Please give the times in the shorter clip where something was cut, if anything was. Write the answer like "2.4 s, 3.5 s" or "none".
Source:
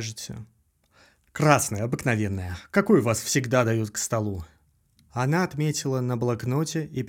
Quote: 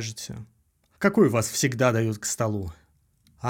1.0 s